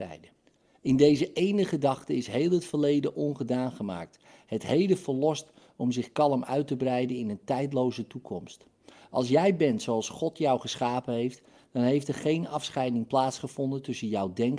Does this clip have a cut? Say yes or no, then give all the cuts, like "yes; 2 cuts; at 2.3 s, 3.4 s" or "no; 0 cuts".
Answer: no; 0 cuts